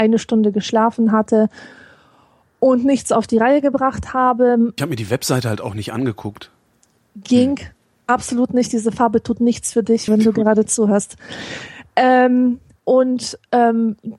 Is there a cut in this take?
yes; 3 cuts; at 4.8 s, 10.1 s, 12.8 s

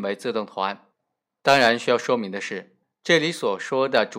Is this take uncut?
no; 1 cut; at 2.8 s

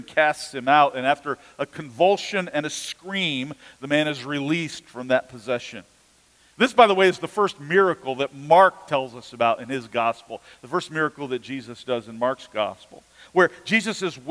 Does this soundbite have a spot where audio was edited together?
no; 0 cuts

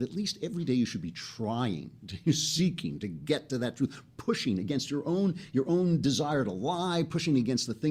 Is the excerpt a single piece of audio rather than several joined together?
yes; 0 cuts

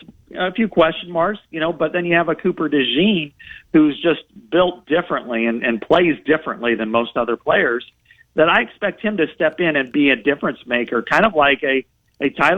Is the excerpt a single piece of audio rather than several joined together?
yes; 0 cuts

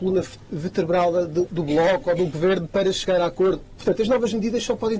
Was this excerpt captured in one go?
no; 2 cuts; at 1.5 s, 3.8 s

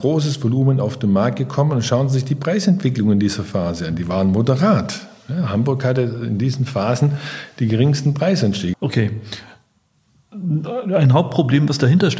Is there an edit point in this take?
yes; 1 cut; at 8.7 s

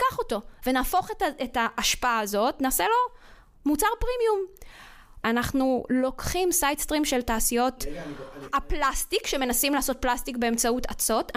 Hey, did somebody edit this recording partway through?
yes; 1 cut; at 5.2 s

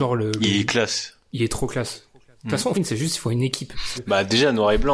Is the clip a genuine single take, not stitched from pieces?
no; 2 cuts; at 2.7 s, 3.9 s

